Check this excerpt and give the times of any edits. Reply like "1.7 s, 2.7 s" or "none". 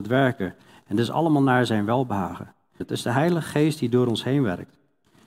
2.8 s